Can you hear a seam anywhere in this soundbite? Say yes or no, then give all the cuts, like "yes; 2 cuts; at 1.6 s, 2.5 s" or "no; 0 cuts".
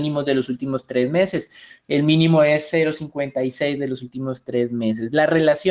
yes; 1 cut; at 1.8 s